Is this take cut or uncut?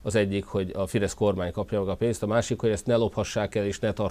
uncut